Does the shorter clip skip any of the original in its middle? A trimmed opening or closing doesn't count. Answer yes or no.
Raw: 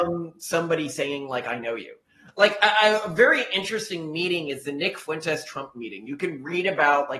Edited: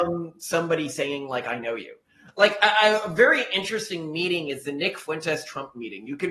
no